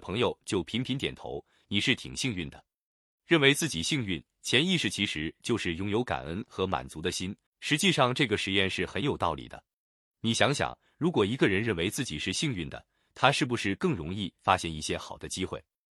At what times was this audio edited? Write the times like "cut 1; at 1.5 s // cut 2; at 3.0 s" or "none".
cut 1; at 3.1 s // cut 2; at 7.5 s